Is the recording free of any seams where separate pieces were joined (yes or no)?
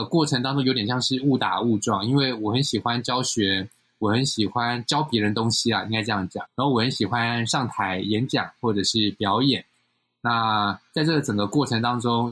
no